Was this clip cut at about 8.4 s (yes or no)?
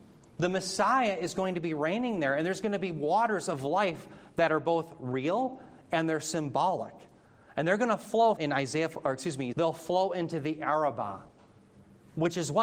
yes